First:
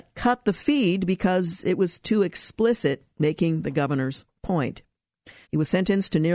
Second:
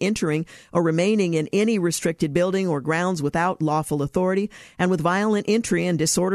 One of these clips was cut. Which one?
first; 1 cut; at 5.4 s

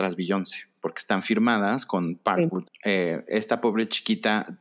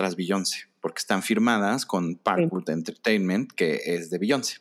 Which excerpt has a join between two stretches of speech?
first; 1 cut; at 2.7 s

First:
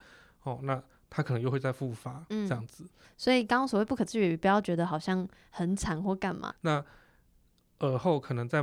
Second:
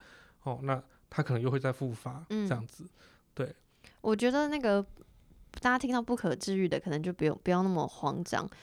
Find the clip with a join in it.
first; 2 cuts; at 3.0 s, 6.5 s

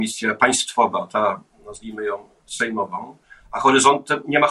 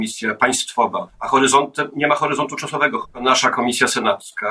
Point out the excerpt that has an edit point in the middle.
second; 2 cuts; at 1.1 s, 3.0 s

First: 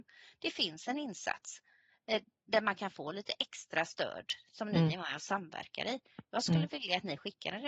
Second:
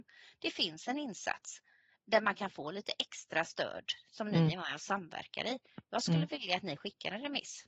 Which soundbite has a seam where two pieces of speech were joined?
second; 1 cut; at 2.0 s

